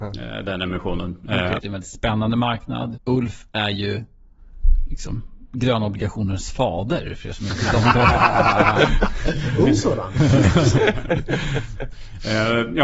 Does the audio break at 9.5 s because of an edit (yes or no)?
no